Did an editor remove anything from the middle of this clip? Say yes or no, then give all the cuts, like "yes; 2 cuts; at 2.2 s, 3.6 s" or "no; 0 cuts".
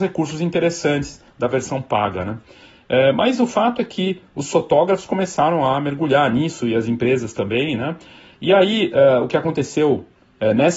no; 0 cuts